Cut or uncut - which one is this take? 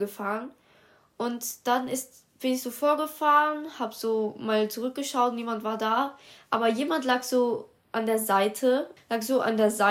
cut